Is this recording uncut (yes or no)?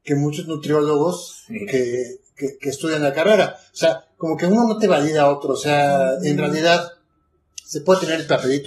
yes